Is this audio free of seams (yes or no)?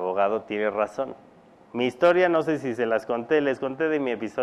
no